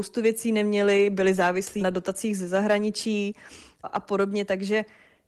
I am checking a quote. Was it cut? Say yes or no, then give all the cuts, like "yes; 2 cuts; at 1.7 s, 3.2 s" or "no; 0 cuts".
yes; 2 cuts; at 1.8 s, 3.8 s